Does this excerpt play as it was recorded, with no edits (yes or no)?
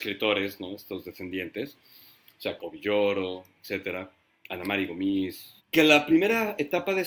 no